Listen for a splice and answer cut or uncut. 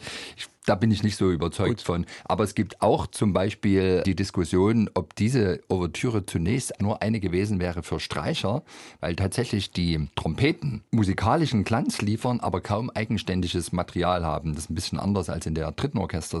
cut